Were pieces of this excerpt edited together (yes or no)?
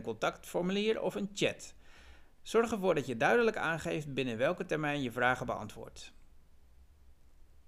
yes